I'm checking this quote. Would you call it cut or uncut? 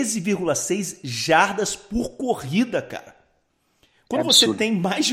uncut